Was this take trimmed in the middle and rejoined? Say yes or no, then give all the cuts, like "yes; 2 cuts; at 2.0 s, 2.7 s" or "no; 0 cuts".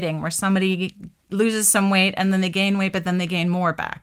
no; 0 cuts